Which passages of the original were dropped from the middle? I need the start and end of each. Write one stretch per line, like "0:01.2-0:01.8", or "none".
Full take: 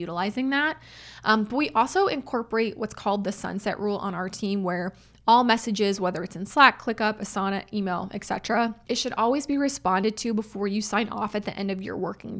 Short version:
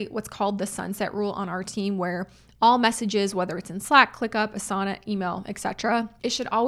none